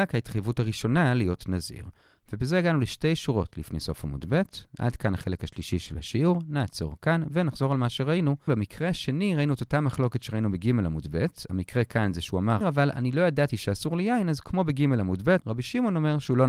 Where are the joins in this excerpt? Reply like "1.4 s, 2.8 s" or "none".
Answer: 8.5 s, 12.6 s, 15.4 s